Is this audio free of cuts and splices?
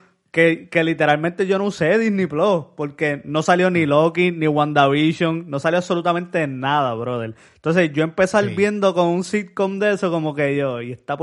yes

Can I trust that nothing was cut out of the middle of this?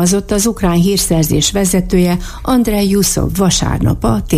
yes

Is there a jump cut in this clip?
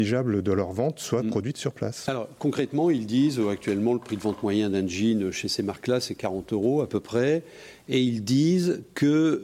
no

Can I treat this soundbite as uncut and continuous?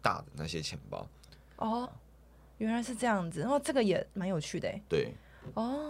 no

